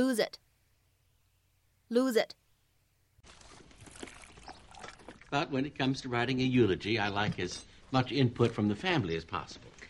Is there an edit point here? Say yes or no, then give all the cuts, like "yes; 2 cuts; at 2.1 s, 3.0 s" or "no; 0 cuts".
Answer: yes; 1 cut; at 5.2 s